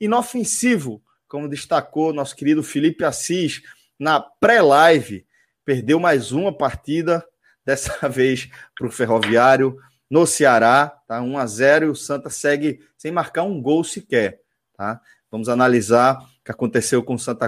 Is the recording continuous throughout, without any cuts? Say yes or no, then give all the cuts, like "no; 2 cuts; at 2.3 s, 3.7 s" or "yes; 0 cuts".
yes; 0 cuts